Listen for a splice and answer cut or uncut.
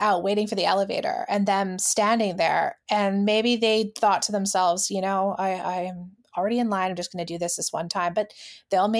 uncut